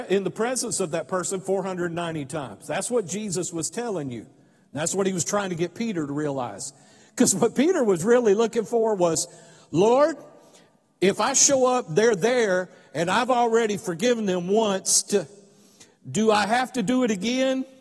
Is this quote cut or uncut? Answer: uncut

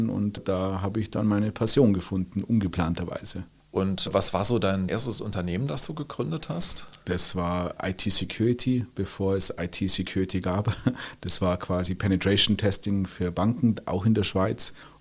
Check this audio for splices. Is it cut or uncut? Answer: uncut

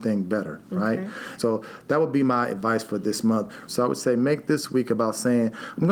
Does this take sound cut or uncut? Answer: cut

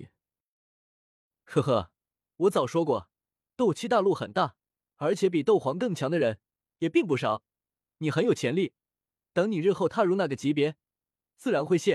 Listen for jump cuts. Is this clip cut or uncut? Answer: uncut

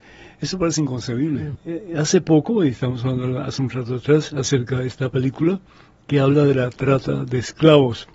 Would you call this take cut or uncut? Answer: cut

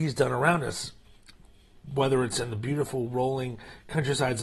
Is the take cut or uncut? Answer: uncut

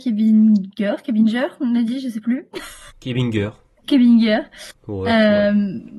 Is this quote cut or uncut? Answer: uncut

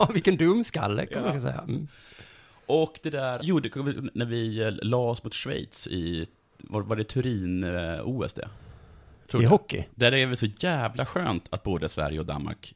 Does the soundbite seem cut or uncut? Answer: cut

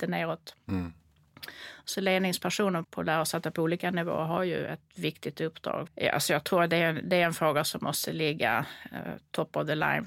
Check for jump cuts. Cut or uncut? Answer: cut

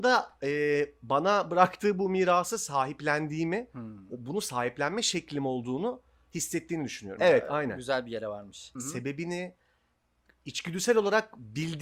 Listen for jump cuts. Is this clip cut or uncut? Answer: cut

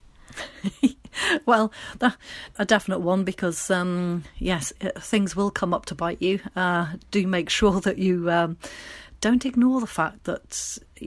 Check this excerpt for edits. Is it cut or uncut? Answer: cut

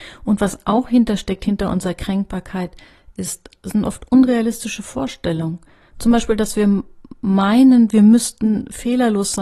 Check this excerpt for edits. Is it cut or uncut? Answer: uncut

